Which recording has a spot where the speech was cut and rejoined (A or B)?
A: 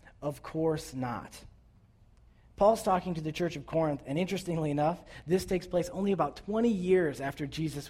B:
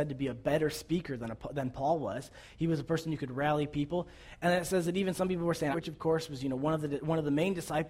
B